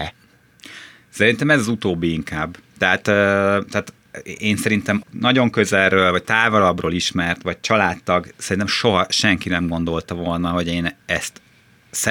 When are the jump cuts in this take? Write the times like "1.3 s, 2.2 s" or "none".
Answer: 5.0 s